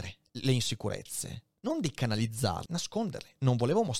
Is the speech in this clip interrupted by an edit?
yes; 1 cut; at 2.7 s

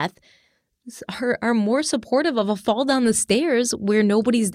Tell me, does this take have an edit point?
no; 0 cuts

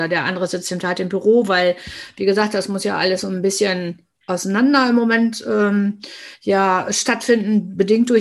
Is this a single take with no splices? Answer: yes; 0 cuts

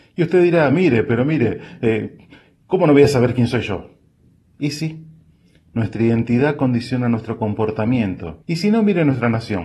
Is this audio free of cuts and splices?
no; 1 cut; at 8.4 s

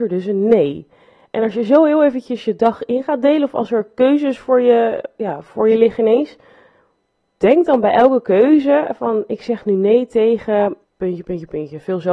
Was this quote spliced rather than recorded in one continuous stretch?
yes; 1 cut; at 10.8 s

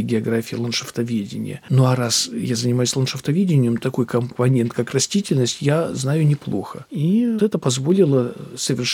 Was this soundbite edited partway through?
yes; 2 cuts; at 3.8 s, 7.4 s

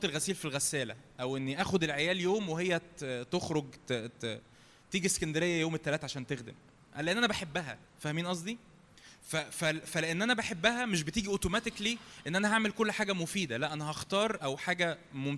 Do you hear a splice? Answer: yes; 1 cut; at 7.9 s

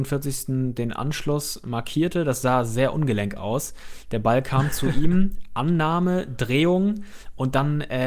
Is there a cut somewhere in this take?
no; 0 cuts

